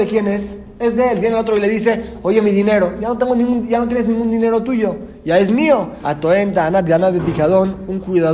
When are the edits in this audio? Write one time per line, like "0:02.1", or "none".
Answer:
0:06.0

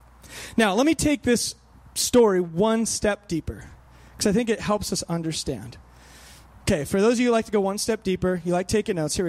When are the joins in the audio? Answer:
none

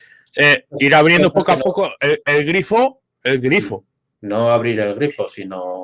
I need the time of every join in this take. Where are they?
0:04.1

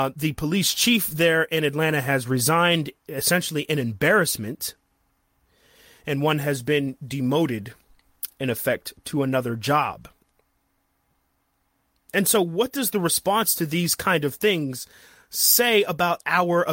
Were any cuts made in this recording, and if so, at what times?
none

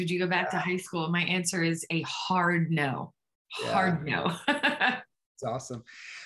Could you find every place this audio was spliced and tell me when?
none

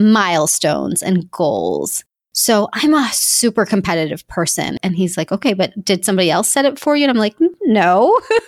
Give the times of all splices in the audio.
0:04.8

